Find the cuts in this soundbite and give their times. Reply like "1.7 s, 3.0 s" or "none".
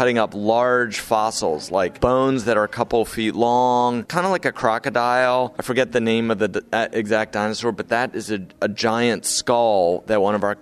4.1 s